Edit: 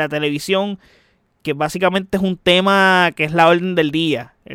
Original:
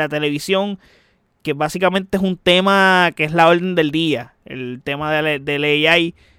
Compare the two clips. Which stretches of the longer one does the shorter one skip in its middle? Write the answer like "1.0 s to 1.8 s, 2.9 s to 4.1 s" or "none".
none

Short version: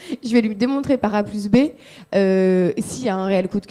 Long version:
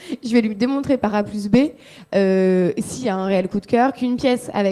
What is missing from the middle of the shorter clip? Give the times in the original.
none

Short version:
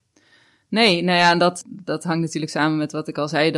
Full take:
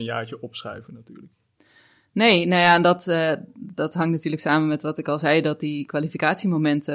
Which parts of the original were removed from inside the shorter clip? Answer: 3.0 s to 3.5 s

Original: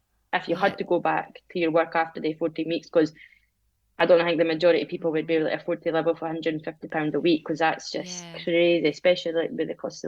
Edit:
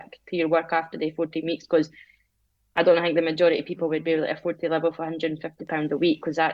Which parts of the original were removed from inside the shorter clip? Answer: none

